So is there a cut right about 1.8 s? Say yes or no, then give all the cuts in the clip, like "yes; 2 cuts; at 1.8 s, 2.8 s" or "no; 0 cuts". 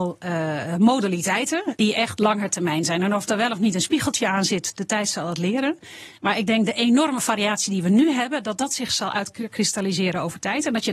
yes; 1 cut; at 1.8 s